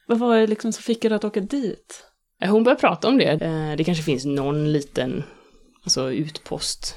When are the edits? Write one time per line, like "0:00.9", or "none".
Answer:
0:03.4